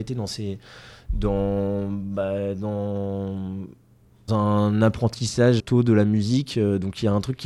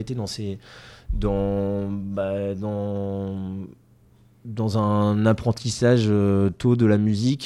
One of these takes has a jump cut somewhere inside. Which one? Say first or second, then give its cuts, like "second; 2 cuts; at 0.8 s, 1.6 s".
first; 2 cuts; at 4.3 s, 5.6 s